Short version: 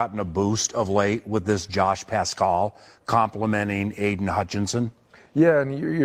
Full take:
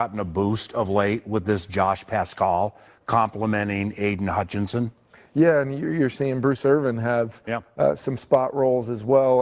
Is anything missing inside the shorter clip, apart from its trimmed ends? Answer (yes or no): no